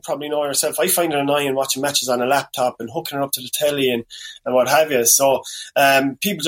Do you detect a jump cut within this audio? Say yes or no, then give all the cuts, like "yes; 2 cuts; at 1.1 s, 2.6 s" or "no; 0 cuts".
no; 0 cuts